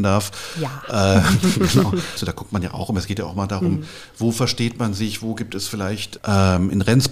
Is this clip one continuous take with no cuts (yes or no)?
no